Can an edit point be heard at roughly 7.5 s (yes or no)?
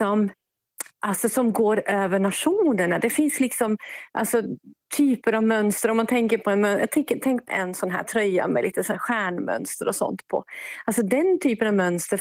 yes